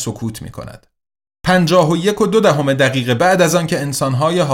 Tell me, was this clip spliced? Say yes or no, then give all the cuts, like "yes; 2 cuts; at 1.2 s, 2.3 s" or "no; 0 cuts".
yes; 1 cut; at 3.2 s